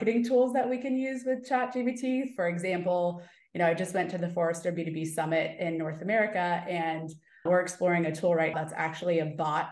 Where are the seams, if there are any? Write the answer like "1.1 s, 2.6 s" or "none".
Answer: 7.5 s, 8.5 s